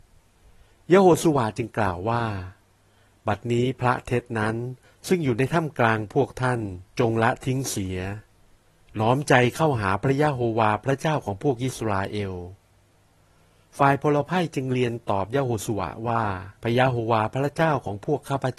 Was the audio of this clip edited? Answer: yes; 2 cuts; at 6.9 s, 16.6 s

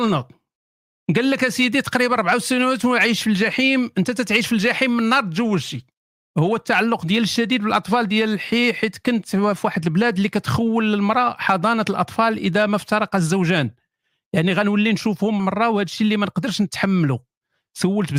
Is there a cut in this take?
yes; 1 cut; at 15.4 s

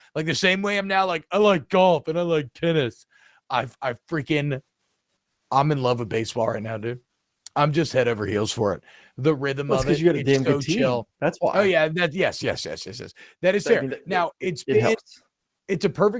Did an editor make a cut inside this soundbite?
no; 0 cuts

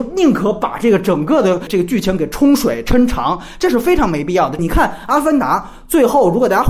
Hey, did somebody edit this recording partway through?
yes; 1 cut; at 4.6 s

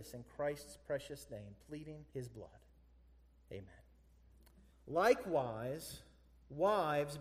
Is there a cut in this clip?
yes; 2 cuts; at 2.1 s, 4.7 s

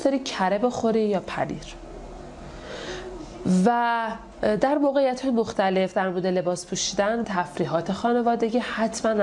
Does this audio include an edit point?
yes; 1 cut; at 7.2 s

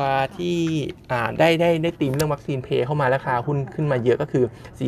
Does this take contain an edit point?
no; 0 cuts

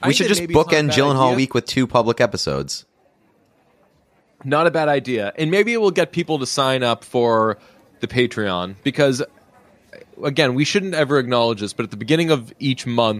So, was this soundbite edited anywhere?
no; 0 cuts

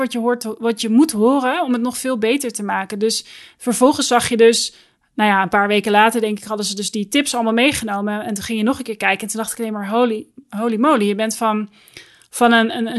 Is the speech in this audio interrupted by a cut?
no; 0 cuts

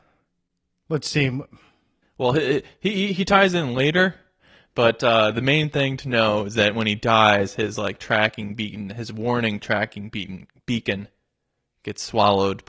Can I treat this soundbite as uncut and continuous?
yes; 0 cuts

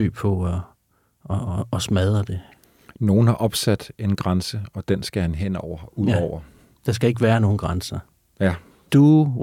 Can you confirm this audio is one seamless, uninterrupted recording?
yes; 0 cuts

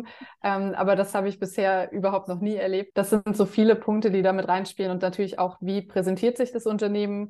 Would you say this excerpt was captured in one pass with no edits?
no; 1 cut; at 2.9 s

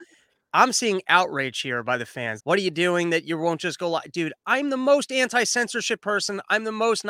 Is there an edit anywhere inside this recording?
yes; 1 cut; at 2.4 s

